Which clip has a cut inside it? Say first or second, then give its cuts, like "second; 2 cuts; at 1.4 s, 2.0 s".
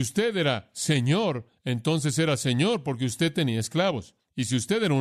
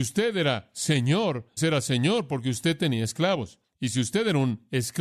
second; 1 cut; at 1.6 s